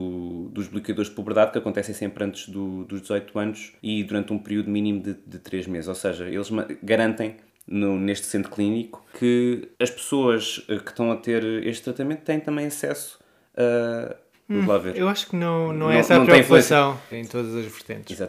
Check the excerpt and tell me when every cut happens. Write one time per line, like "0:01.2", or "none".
0:03.8
0:14.3
0:17.1